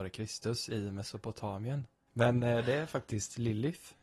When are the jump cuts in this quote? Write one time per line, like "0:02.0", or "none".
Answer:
0:02.1